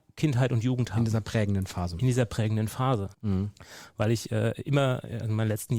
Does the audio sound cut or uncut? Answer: cut